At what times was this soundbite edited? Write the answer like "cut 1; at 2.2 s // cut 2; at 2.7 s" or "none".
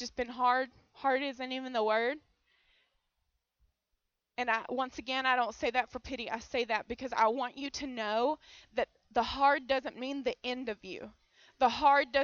none